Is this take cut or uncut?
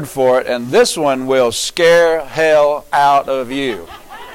uncut